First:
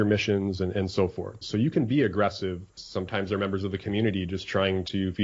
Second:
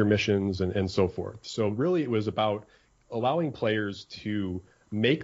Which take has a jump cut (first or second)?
first